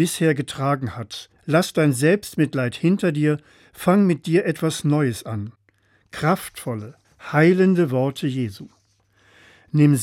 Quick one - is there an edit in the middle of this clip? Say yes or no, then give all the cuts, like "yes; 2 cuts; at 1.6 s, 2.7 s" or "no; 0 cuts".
yes; 1 cut; at 1.4 s